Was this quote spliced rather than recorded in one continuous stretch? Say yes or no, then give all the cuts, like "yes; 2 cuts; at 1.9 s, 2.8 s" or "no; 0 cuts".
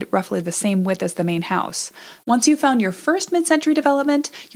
yes; 1 cut; at 2.2 s